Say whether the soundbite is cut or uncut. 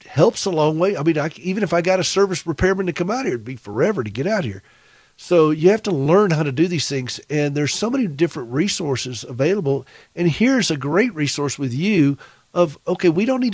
uncut